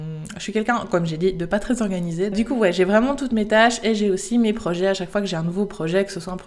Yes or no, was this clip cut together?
yes